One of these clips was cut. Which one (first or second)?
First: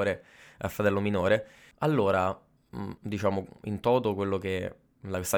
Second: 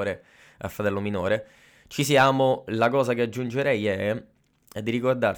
first